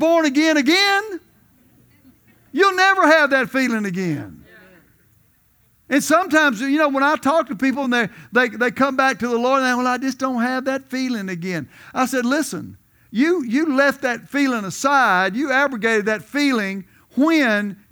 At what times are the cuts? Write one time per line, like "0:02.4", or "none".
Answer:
none